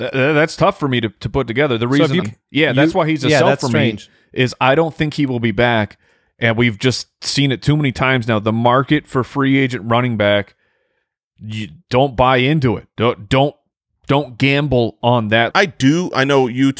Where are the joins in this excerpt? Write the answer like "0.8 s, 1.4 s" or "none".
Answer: 2.2 s, 15.5 s